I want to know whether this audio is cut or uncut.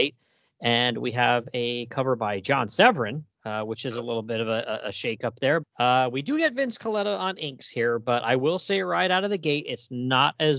cut